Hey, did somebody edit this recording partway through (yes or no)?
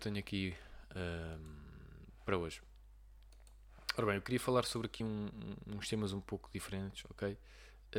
no